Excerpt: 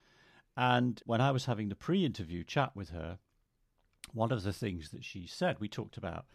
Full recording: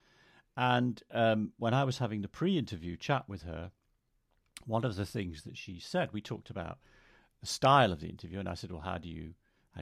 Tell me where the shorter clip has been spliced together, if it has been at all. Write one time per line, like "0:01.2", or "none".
0:01.0